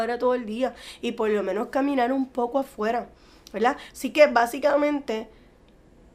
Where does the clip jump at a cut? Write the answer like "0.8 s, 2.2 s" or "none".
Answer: 3.9 s